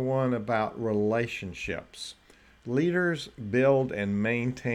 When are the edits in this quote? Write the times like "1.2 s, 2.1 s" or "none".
none